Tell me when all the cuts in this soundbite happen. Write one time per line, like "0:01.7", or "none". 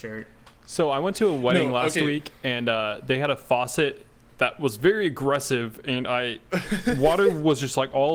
none